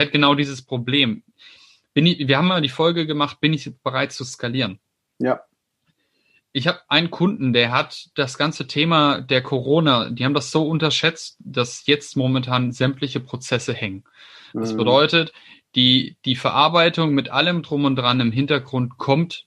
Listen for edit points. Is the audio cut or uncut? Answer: uncut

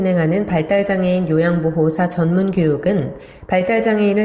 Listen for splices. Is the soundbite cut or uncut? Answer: uncut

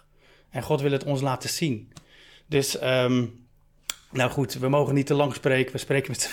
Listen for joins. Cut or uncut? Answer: uncut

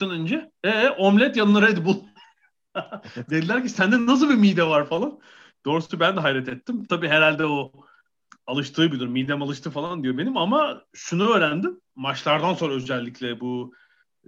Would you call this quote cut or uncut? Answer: cut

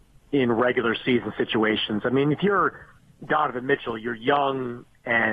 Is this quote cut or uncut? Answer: uncut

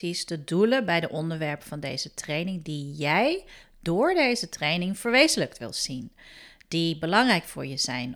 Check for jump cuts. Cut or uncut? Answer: uncut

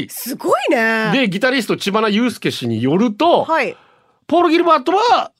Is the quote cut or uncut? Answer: uncut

